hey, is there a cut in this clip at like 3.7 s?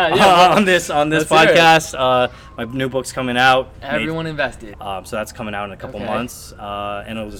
yes; 2 cuts; at 3.7 s, 4.7 s

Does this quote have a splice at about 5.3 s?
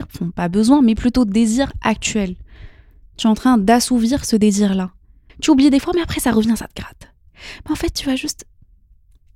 yes; 1 cut; at 5.3 s

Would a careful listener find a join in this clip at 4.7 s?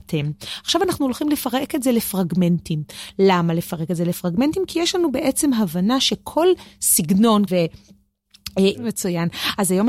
no; 2 cuts; at 7.5 s, 8.7 s

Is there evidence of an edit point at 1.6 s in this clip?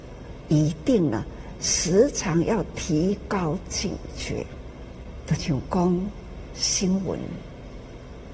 no; 1 cut; at 5.4 s

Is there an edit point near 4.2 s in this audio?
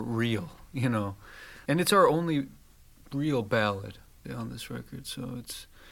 yes; 2 cuts; at 1.7 s, 4.2 s

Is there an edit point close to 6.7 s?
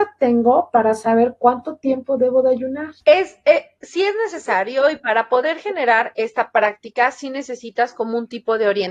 no; 1 cut; at 3.0 s

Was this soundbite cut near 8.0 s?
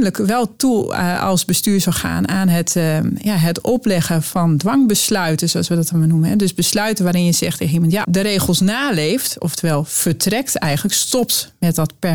yes; 1 cut; at 8.0 s

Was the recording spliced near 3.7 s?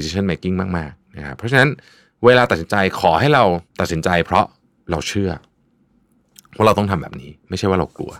yes; 1 cut; at 3.7 s

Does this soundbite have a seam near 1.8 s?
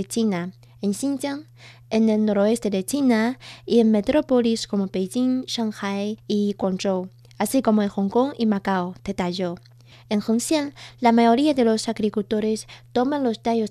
no; 1 cut; at 9.9 s

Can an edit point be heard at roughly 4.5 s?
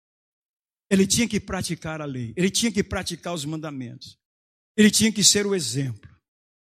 no; 0 cuts

